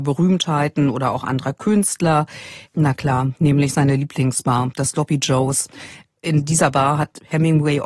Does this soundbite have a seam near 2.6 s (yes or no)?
yes